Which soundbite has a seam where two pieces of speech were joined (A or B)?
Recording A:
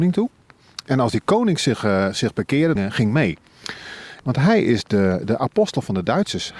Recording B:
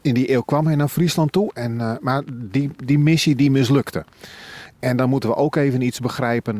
A